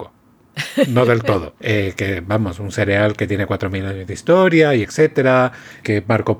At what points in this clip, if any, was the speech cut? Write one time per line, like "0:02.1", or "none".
0:01.6
0:04.8